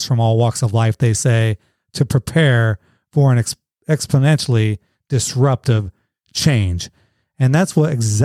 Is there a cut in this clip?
no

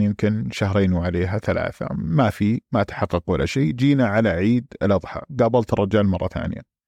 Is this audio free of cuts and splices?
yes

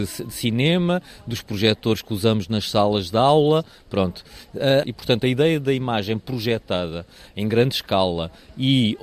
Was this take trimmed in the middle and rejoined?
yes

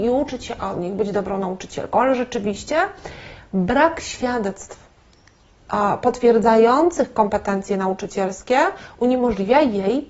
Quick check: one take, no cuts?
yes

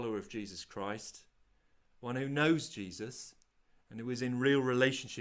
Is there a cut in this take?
yes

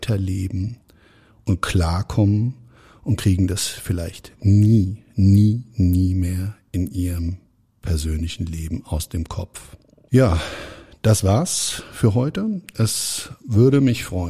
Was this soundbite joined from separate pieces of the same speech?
no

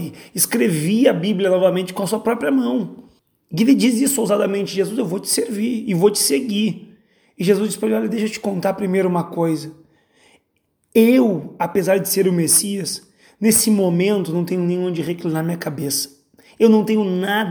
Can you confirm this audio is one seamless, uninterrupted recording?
yes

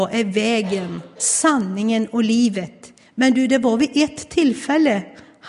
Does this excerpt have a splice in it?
yes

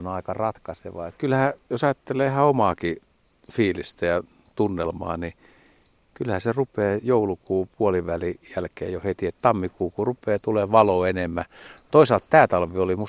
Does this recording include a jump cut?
no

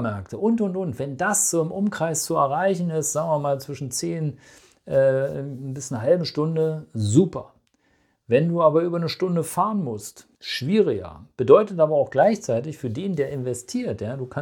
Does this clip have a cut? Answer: yes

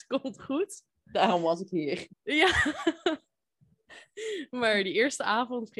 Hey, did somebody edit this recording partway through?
yes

